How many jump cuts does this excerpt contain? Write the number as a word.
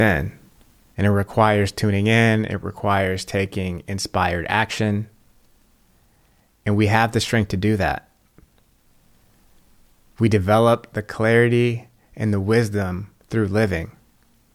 one